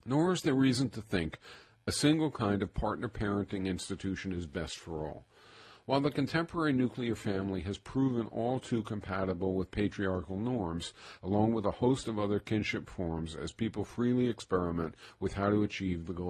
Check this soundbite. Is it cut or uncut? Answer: cut